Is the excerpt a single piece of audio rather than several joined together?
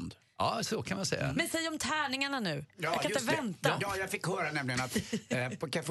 yes; 0 cuts

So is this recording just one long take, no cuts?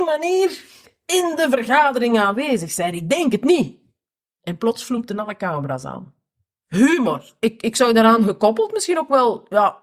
no; 1 cut; at 7.4 s

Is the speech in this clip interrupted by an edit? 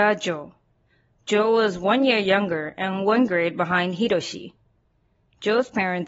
no; 0 cuts

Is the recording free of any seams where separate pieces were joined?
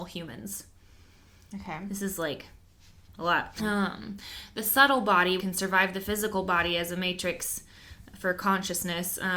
no; 2 cuts; at 3.6 s, 5.4 s

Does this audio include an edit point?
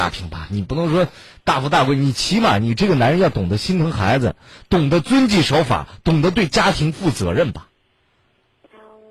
no; 0 cuts

